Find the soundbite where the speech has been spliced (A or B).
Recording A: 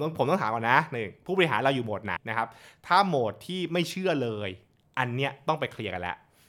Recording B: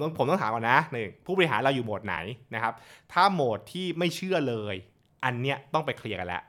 A